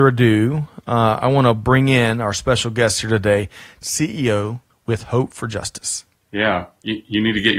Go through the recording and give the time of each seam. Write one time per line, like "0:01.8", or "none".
0:03.8
0:06.2